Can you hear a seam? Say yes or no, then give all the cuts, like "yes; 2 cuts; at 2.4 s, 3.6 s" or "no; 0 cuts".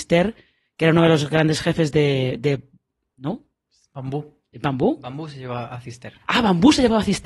no; 0 cuts